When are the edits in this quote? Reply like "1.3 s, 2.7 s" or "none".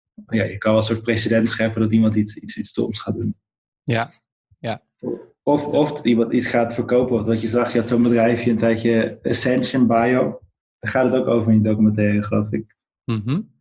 none